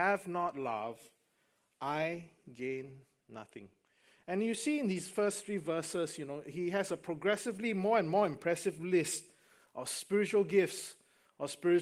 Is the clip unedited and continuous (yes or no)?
yes